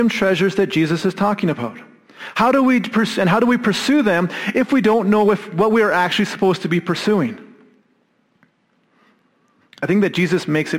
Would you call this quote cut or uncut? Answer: cut